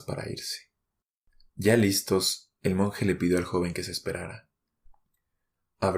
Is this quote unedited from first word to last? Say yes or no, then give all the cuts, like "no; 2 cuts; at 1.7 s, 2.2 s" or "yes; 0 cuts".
yes; 0 cuts